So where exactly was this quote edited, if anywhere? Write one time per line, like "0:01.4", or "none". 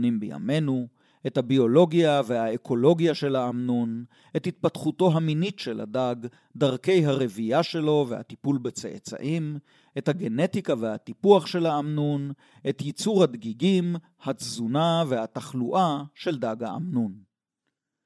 none